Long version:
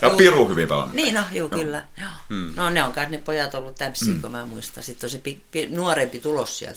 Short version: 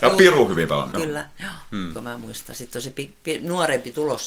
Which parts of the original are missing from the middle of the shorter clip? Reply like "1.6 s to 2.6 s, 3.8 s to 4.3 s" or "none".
0.9 s to 1.5 s, 2.5 s to 4.2 s